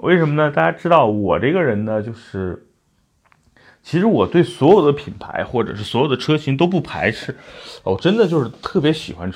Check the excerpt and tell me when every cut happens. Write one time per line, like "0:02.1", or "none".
none